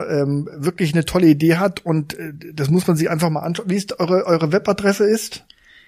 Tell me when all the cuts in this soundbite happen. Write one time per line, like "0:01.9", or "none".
none